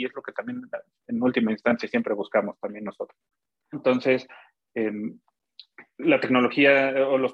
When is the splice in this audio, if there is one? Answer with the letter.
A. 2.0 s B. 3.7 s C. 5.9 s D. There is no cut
B